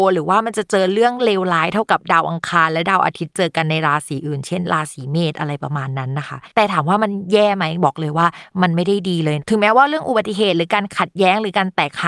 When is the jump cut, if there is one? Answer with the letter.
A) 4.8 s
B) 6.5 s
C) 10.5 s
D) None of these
B